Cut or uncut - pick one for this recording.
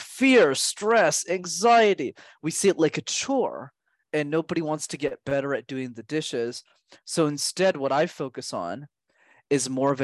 uncut